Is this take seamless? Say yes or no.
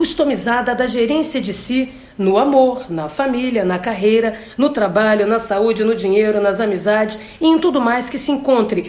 yes